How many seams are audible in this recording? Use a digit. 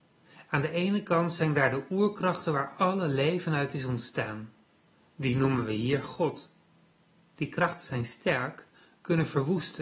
0